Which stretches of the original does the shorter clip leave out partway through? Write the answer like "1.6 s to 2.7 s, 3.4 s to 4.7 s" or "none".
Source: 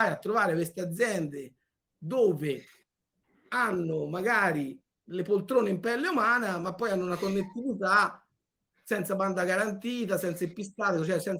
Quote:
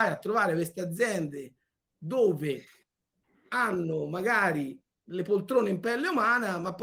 none